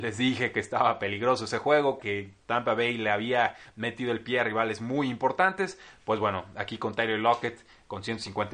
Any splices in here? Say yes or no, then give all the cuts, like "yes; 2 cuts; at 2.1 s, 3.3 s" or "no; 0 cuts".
yes; 1 cut; at 2.0 s